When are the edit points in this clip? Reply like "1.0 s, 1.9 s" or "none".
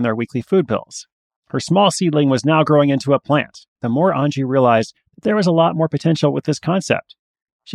1.4 s, 3.8 s